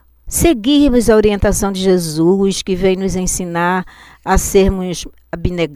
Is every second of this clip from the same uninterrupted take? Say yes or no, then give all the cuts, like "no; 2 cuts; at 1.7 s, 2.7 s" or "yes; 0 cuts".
yes; 0 cuts